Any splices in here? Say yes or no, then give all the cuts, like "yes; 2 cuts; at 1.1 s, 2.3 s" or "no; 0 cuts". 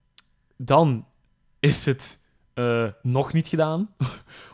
no; 0 cuts